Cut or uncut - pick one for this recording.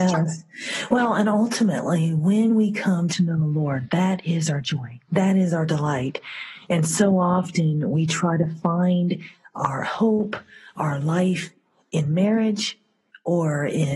uncut